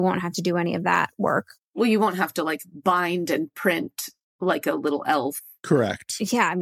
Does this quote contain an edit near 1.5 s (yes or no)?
no